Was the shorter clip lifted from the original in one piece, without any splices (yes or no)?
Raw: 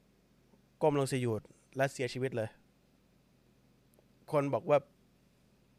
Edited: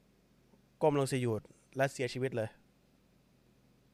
yes